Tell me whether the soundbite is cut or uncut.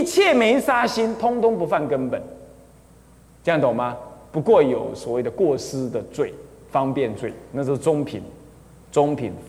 uncut